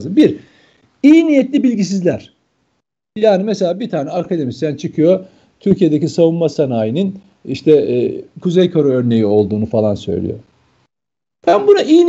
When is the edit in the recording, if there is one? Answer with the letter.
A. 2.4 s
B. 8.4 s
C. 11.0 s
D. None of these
B